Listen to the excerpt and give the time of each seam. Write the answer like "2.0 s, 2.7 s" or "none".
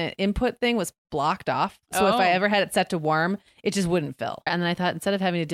4.5 s